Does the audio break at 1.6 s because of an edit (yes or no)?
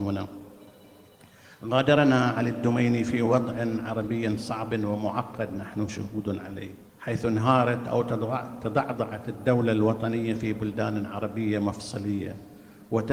no